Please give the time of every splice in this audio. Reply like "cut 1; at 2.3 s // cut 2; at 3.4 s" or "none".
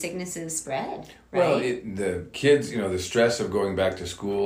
none